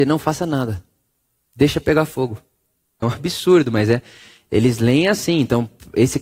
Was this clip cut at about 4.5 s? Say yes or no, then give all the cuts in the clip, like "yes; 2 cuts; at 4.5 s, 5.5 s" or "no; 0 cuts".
no; 1 cut; at 3.0 s